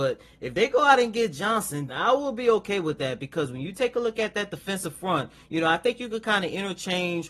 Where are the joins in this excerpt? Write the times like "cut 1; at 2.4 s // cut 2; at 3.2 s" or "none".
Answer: cut 1; at 1.9 s